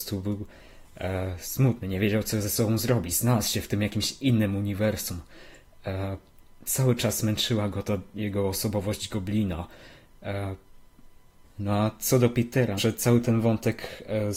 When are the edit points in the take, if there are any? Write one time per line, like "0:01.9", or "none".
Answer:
0:11.4
0:12.8